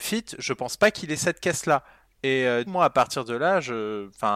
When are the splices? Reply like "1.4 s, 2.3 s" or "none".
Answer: 2.7 s